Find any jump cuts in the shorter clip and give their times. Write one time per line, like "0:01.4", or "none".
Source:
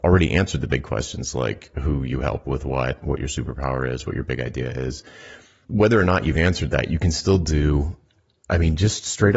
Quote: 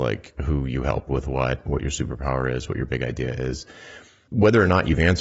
none